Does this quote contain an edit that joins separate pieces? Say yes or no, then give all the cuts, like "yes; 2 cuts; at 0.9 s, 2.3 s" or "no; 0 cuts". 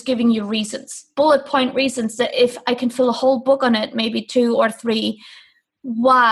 no; 0 cuts